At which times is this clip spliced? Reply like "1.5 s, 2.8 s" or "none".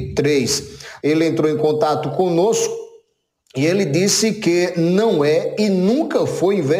1.0 s